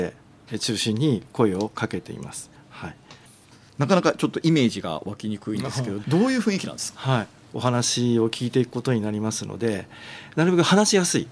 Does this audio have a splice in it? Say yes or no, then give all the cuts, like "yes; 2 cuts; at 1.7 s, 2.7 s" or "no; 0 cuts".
yes; 1 cut; at 7.5 s